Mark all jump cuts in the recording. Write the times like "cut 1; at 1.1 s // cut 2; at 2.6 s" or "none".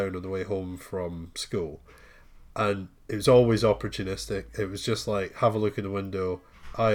none